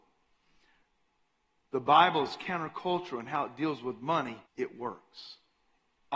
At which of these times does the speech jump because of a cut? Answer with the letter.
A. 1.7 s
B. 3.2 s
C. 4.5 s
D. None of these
C